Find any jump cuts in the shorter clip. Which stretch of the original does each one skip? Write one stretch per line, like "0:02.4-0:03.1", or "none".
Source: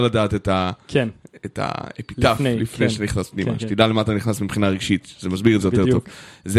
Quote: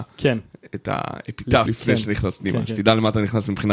0:02.4-0:02.6